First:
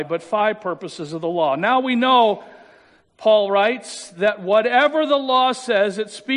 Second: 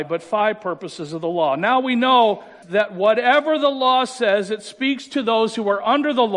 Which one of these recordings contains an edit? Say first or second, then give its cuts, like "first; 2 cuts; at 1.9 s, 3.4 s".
second; 1 cut; at 2.6 s